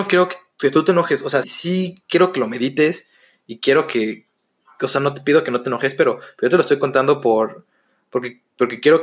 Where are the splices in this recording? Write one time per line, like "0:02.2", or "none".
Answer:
0:01.4